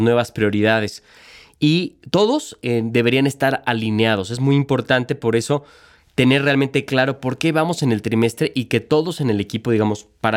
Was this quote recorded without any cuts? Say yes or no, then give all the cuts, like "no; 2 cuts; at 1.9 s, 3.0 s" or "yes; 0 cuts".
yes; 0 cuts